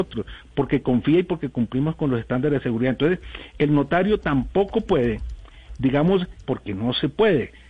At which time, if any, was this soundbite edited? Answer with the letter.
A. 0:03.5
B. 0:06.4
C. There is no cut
B